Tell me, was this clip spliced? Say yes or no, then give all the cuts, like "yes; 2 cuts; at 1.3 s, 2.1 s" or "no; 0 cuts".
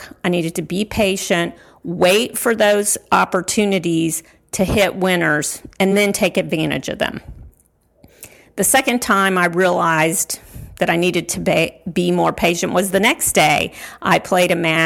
no; 0 cuts